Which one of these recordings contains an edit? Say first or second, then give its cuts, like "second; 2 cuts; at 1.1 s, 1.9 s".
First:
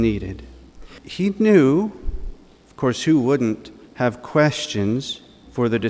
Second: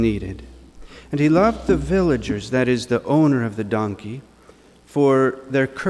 first; 1 cut; at 1.0 s